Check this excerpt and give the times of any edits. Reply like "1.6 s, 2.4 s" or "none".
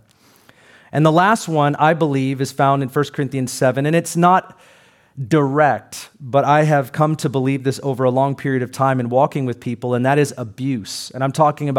none